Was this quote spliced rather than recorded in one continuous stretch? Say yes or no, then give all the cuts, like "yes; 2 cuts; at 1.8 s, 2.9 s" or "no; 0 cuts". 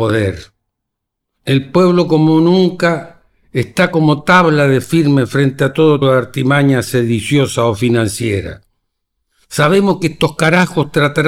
yes; 2 cuts; at 1.3 s, 6.0 s